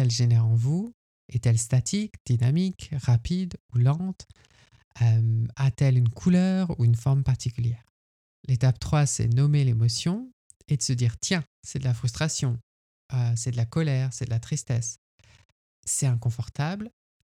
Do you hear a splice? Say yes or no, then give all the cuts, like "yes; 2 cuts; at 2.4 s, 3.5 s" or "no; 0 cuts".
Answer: no; 0 cuts